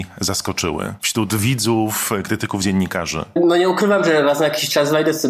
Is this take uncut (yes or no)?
yes